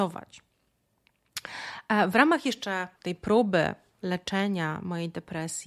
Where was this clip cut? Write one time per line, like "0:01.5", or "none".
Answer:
0:03.0

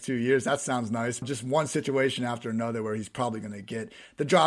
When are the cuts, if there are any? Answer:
0:01.2

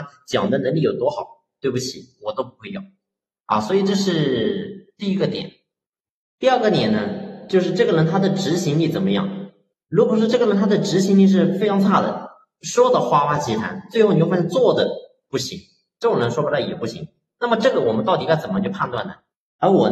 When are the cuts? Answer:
none

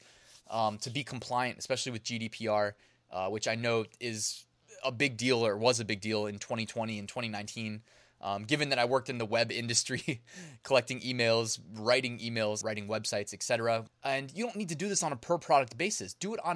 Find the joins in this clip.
0:12.6
0:13.9

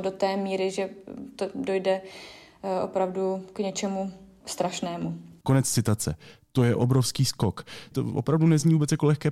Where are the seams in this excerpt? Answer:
0:05.4
0:07.9

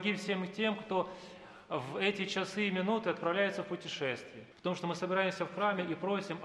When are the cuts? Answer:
0:04.5

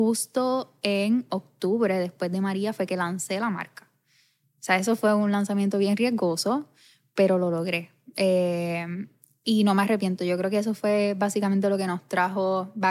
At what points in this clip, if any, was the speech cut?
none

